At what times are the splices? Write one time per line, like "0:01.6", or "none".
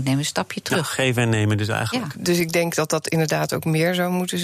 0:02.1